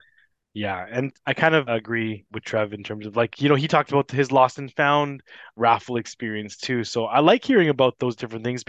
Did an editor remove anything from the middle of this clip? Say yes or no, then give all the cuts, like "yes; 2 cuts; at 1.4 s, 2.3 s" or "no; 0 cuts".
yes; 1 cut; at 1.7 s